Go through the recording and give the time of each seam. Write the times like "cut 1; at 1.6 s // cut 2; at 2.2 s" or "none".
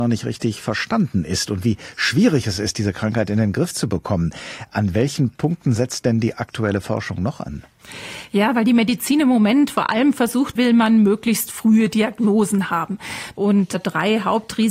cut 1; at 10.6 s // cut 2; at 13.3 s